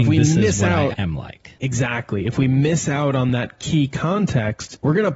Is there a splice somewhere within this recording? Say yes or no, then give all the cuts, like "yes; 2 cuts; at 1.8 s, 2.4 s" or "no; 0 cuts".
yes; 1 cut; at 0.9 s